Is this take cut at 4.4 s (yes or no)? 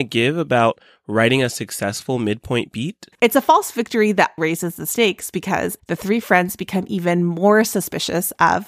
yes